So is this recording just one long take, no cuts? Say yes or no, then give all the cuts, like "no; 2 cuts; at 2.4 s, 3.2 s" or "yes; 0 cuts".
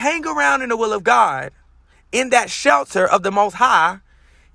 yes; 0 cuts